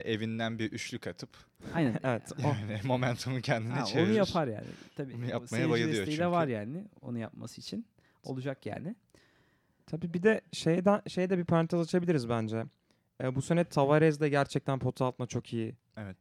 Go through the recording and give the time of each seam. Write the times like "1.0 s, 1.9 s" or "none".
none

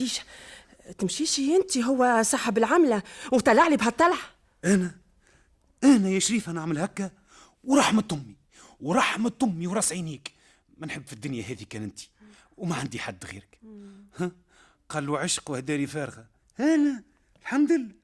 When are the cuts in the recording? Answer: none

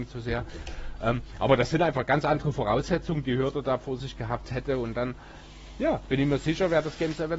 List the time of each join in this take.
none

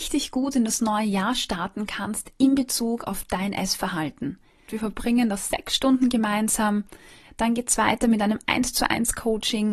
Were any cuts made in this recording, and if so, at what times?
4.7 s, 7.2 s

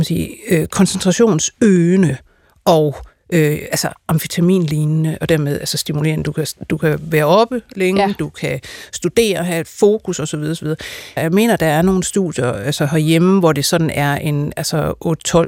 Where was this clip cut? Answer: 11.2 s

